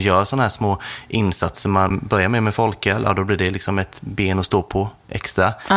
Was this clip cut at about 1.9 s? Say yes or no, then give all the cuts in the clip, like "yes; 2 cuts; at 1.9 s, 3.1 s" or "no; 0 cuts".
yes; 1 cut; at 1.9 s